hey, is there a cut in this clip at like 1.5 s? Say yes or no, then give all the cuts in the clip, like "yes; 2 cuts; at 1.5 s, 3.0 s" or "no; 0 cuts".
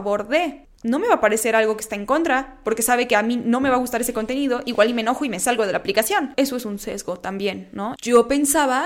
no; 2 cuts; at 6.3 s, 8.0 s